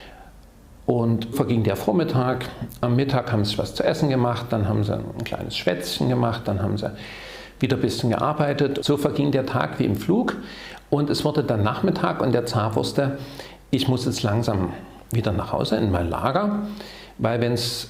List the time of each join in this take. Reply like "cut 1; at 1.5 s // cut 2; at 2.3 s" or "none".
cut 1; at 1.3 s